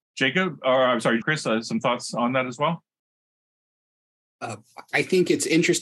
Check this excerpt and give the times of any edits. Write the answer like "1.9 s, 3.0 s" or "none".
1.2 s